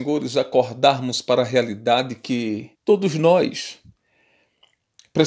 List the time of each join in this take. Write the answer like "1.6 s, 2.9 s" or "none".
2.7 s